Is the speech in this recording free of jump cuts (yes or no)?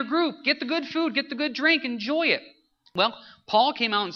yes